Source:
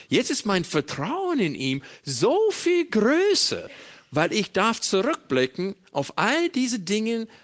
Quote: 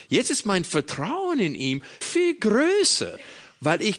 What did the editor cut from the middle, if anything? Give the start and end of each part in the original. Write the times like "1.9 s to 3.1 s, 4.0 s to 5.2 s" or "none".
2.0 s to 2.5 s